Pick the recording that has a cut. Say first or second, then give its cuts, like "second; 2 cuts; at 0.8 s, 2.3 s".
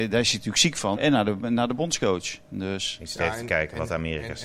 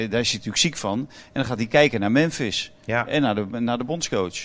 first; 1 cut; at 1.0 s